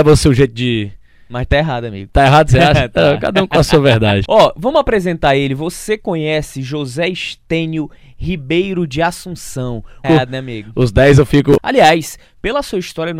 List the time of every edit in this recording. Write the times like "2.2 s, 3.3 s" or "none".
4.2 s, 10.0 s, 11.6 s